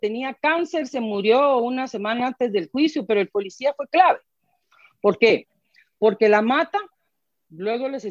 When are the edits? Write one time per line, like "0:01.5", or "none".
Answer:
none